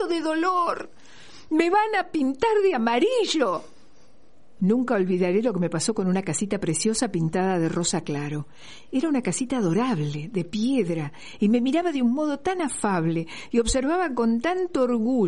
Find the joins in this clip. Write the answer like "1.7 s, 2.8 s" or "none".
4.6 s